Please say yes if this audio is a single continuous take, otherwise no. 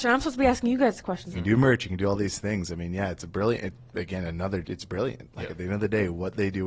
no